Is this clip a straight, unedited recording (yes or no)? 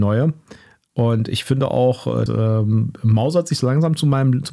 no